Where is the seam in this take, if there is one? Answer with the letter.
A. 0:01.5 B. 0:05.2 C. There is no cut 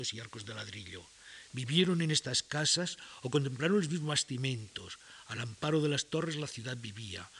A